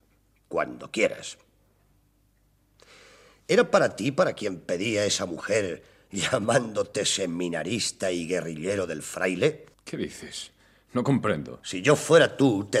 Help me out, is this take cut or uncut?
cut